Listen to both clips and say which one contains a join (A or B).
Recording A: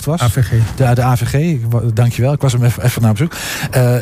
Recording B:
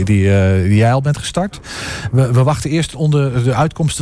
A